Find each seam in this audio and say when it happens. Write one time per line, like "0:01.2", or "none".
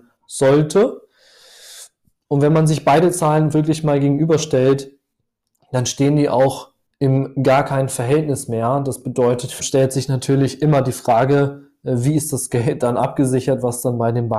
0:09.6